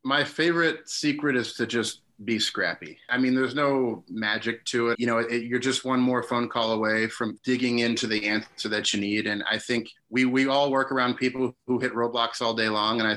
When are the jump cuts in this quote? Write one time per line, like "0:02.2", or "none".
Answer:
0:04.9